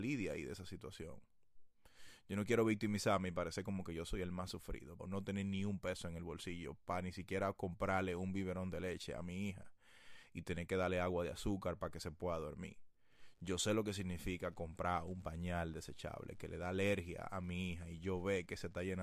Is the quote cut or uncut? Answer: cut